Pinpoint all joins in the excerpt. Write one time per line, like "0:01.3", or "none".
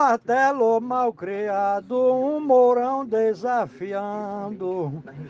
none